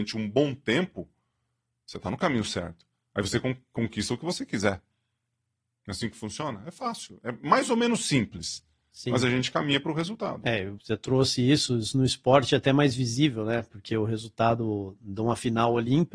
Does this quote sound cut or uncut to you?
cut